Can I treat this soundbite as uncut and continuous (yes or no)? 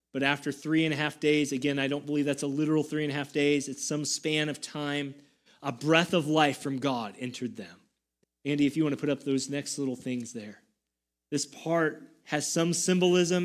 no